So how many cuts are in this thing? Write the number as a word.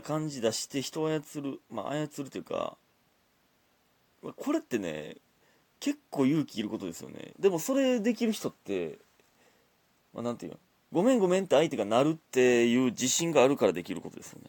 two